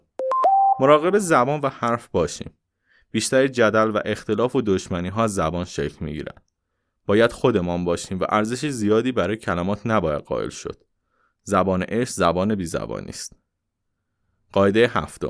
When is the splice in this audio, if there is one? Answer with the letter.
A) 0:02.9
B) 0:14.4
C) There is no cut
C